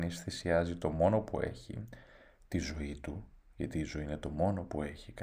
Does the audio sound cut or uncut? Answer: uncut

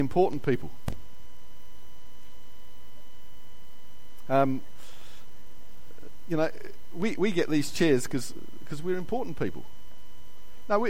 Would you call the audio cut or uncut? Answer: uncut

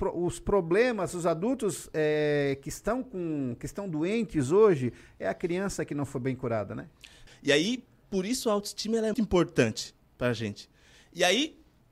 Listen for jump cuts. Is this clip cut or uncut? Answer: cut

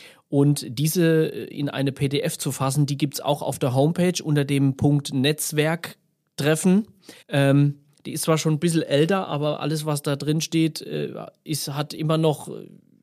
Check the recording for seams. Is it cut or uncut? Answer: cut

